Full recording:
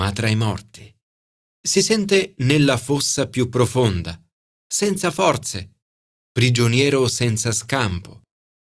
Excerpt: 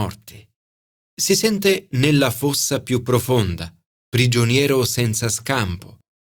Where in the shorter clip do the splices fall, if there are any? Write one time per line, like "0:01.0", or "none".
0:03.9